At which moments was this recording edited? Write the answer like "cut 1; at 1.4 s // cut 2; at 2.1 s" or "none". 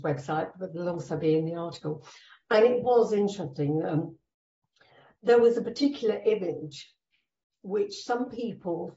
none